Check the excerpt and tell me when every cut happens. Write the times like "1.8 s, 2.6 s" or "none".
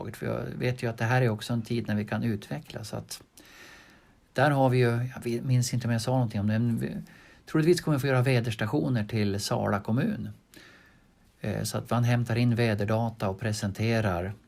none